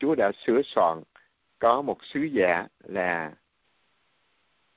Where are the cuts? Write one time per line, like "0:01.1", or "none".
none